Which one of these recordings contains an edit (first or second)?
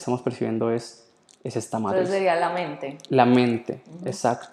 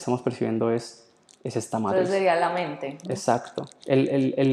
second